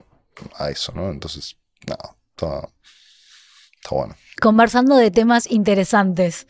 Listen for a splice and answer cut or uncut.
cut